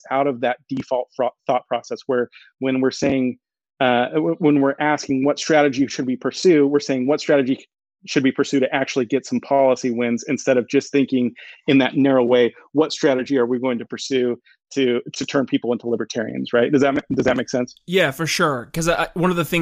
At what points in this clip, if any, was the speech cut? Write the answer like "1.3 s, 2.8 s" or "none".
none